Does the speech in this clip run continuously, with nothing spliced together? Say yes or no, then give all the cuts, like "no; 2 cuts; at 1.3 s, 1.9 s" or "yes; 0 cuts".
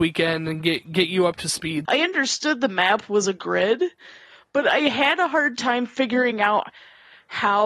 no; 1 cut; at 1.9 s